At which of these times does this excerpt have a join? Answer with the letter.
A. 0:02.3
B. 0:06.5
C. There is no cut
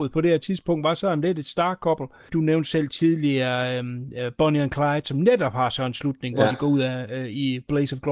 A